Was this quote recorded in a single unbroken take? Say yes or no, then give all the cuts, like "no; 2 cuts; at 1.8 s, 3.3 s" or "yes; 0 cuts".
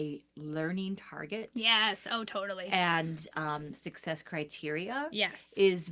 yes; 0 cuts